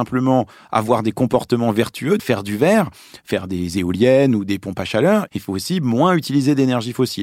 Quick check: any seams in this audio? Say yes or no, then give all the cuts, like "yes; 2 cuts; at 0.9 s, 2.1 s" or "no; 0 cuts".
yes; 2 cuts; at 2.2 s, 5.3 s